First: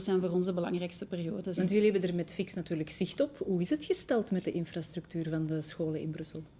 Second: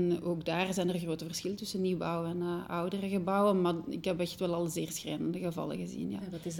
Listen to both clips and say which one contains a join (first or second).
first